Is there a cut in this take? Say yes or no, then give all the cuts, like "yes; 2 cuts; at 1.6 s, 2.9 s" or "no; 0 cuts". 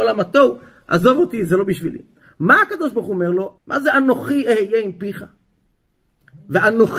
yes; 1 cut; at 3.6 s